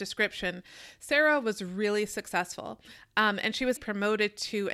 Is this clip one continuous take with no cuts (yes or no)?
no